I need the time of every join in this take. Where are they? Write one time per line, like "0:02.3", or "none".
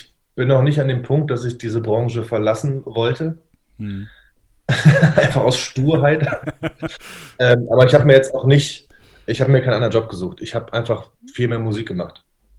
none